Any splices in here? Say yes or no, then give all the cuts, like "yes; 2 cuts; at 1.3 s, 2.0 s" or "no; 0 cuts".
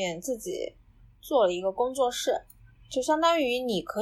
no; 0 cuts